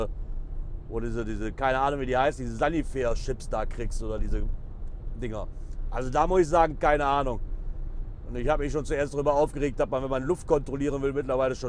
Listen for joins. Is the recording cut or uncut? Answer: uncut